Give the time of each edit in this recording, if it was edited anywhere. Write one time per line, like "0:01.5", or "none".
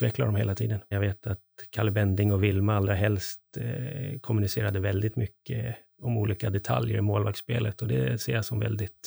0:00.9